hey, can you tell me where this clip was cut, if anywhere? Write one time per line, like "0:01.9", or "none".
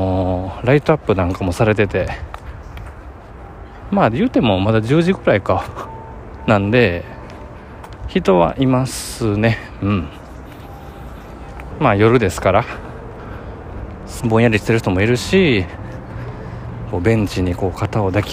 0:11.7
0:14.2
0:16.9